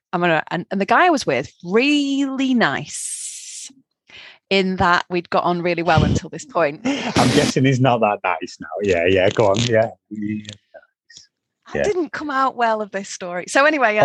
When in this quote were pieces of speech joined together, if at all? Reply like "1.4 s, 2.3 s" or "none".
none